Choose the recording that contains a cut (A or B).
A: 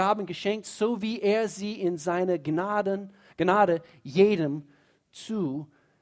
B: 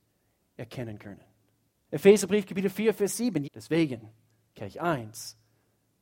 B